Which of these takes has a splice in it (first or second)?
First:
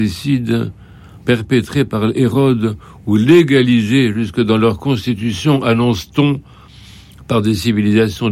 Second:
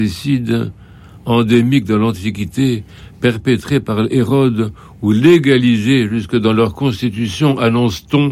first